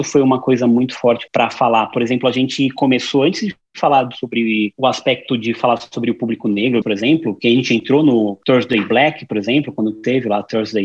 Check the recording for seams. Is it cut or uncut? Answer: cut